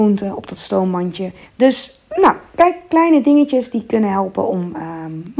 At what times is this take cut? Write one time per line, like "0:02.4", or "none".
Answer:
0:01.4